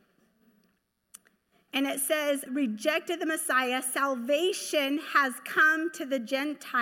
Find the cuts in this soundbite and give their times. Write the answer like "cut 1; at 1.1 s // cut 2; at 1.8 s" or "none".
cut 1; at 2.5 s